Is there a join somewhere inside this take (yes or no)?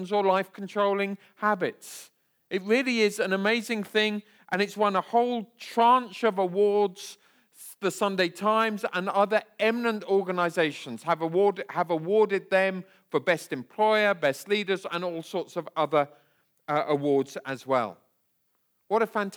no